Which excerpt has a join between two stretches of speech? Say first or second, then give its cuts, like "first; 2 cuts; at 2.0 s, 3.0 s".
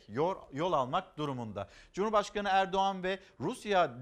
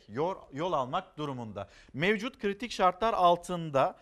second; 1 cut; at 1.9 s